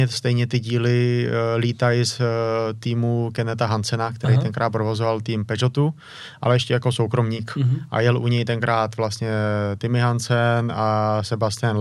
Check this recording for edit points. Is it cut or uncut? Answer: uncut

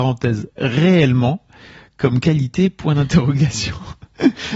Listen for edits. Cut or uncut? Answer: uncut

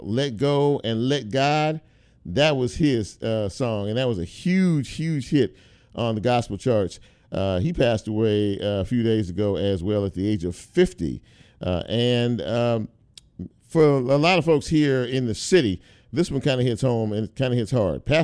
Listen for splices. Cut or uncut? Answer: uncut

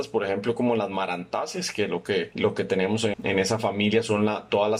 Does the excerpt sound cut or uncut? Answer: cut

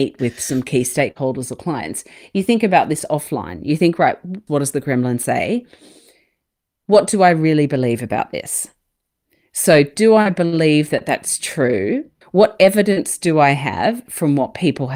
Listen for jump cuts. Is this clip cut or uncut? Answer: cut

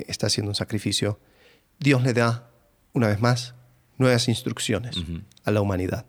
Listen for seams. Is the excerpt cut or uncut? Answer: uncut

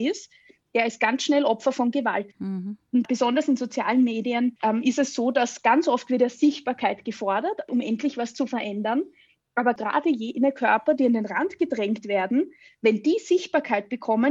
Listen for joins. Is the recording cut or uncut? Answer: uncut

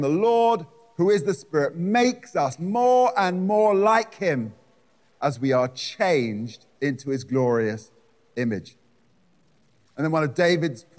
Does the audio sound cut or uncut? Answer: cut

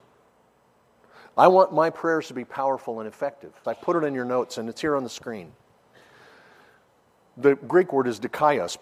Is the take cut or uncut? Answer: cut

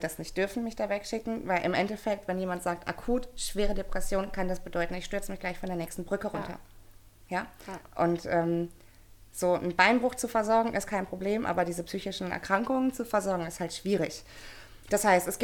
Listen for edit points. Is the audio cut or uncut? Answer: uncut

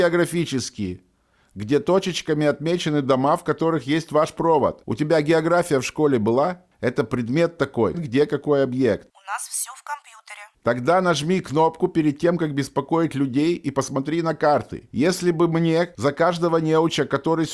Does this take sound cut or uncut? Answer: cut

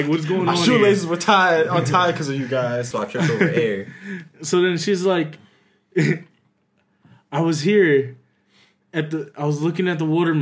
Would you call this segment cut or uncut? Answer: cut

